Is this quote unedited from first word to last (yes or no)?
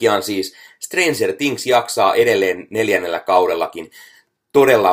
yes